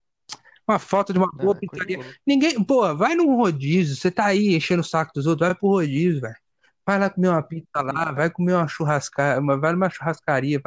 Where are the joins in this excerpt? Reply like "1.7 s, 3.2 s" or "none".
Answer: none